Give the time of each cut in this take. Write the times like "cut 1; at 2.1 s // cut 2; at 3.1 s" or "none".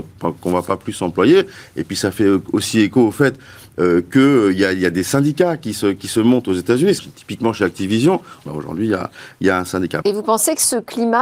cut 1; at 7.0 s // cut 2; at 8.5 s // cut 3; at 10.0 s